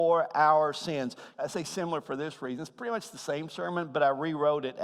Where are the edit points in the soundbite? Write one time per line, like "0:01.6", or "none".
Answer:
0:01.4